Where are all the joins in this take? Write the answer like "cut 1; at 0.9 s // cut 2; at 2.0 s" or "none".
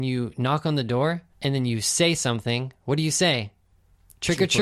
cut 1; at 1.3 s